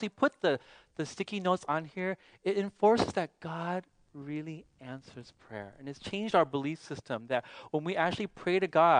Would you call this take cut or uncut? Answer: uncut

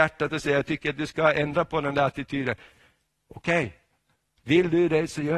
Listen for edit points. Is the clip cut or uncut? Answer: uncut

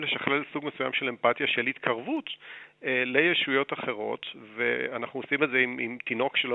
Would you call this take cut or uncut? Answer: uncut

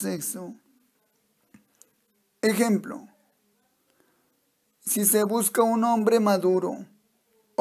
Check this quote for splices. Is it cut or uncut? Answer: uncut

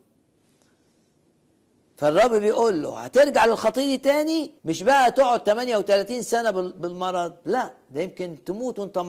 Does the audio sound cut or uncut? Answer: cut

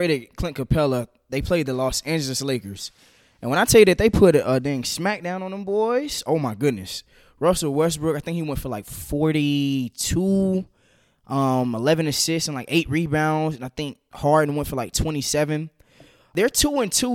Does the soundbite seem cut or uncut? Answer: uncut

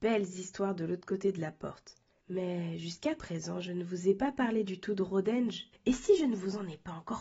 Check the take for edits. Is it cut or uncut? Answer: cut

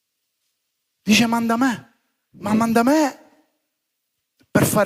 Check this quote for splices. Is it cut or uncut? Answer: uncut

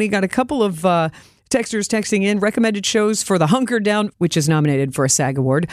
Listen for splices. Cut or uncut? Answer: cut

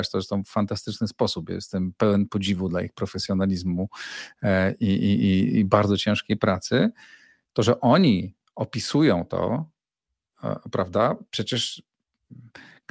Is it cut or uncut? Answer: uncut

